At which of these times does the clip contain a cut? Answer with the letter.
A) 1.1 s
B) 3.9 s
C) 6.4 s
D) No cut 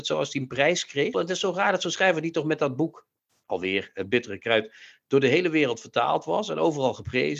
A